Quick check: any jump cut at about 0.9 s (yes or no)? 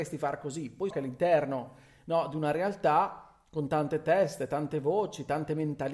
yes